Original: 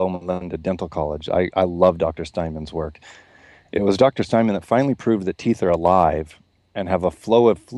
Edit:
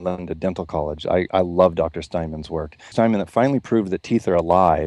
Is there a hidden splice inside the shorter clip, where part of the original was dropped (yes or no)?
yes